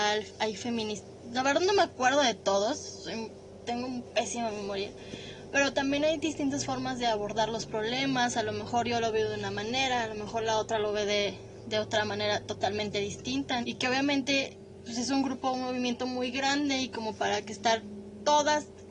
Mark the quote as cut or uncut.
cut